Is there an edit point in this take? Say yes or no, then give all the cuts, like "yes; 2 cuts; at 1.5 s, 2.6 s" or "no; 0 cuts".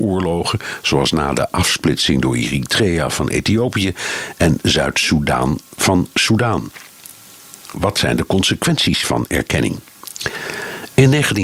yes; 1 cut; at 7.7 s